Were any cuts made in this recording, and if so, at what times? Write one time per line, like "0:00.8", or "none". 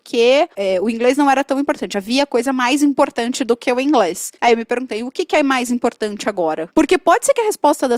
none